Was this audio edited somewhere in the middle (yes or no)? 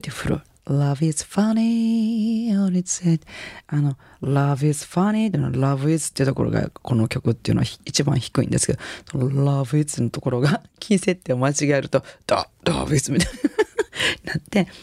no